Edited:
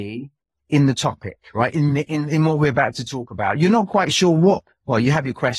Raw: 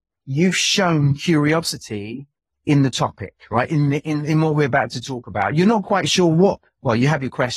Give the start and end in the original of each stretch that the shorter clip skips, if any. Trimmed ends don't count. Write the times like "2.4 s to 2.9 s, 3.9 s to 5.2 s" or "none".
none